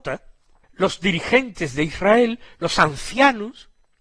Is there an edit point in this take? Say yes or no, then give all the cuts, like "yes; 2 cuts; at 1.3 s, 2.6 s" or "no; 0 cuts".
no; 0 cuts